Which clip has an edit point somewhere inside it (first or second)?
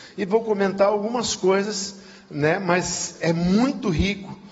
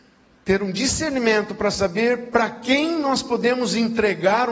first